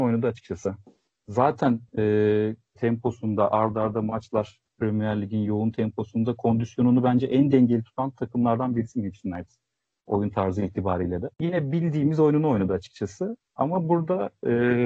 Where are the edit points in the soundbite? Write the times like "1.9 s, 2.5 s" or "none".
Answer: 2.8 s, 11.3 s